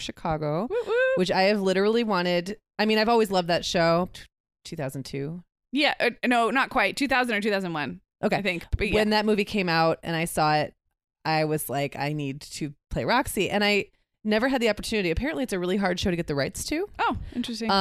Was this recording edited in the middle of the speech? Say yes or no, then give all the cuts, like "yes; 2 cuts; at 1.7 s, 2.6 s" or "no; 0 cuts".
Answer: yes; 1 cut; at 4.1 s